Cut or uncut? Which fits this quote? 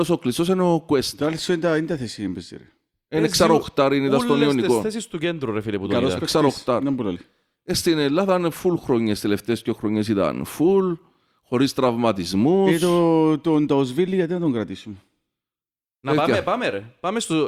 uncut